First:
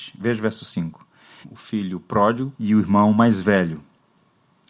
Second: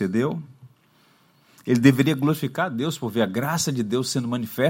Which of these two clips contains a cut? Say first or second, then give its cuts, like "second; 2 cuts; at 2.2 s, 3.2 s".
first; 2 cuts; at 1.4 s, 2.5 s